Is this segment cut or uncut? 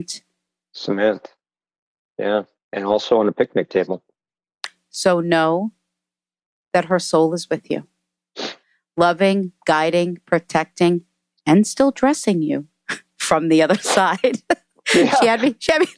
uncut